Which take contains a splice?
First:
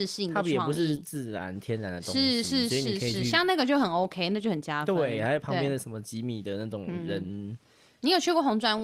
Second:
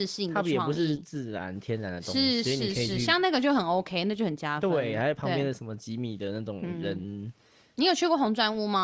second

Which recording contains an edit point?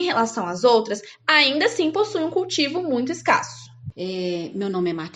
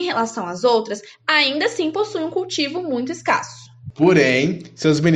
first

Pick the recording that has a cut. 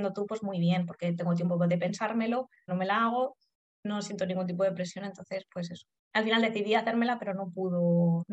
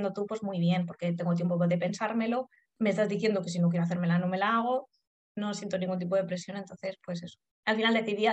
first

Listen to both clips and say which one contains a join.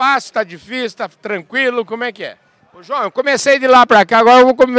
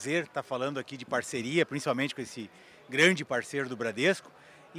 first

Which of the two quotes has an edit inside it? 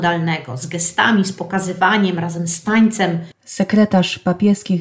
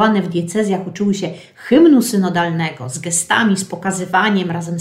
first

